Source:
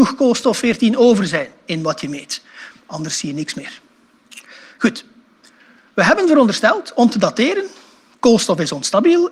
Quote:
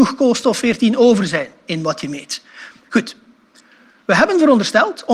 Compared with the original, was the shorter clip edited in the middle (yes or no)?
yes